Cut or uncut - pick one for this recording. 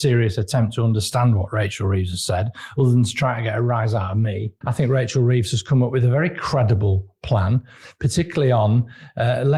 cut